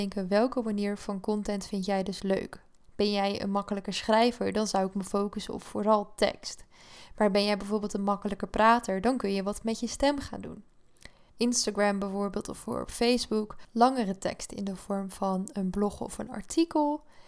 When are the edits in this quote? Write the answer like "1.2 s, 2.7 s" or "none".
11.3 s

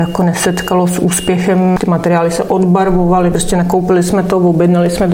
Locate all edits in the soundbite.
none

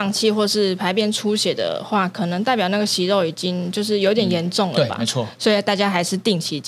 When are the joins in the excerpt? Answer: none

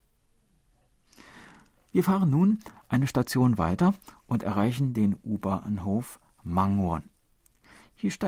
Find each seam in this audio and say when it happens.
none

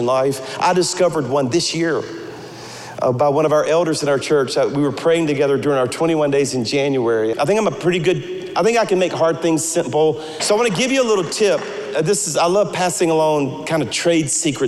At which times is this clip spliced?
7.3 s, 10.4 s

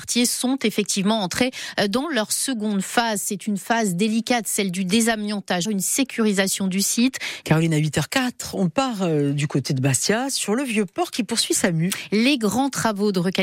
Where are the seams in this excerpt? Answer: 5.6 s, 7.4 s

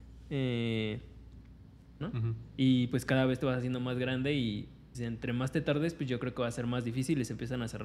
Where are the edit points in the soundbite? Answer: 2.0 s, 4.9 s

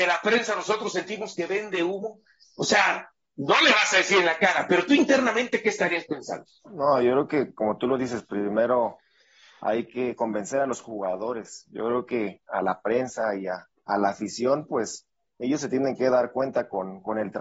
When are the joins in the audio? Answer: 6.6 s

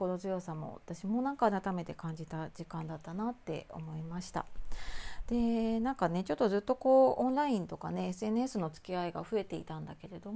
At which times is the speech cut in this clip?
none

